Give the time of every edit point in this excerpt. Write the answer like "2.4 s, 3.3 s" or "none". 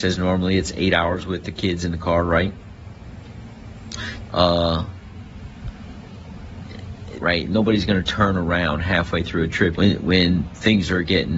4.3 s, 7.2 s, 9.8 s